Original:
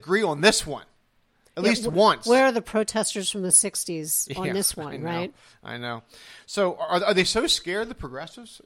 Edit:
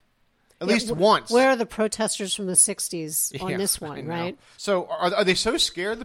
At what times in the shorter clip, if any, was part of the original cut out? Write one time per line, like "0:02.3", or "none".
0:04.6

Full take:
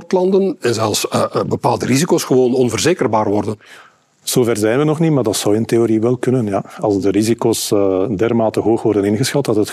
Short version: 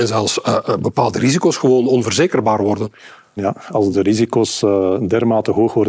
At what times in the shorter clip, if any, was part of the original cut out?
0:03.4

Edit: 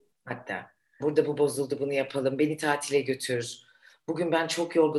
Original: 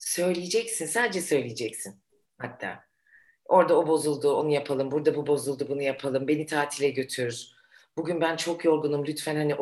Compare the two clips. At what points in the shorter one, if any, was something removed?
0:01.0

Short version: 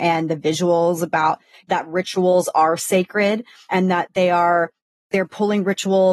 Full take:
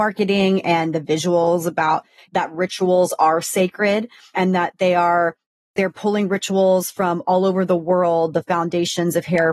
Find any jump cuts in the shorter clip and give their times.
none

